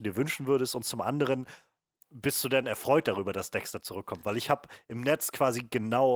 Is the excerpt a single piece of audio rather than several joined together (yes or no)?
yes